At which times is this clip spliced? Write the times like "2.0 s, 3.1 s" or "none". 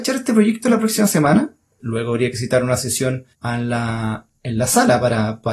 1.8 s, 3.3 s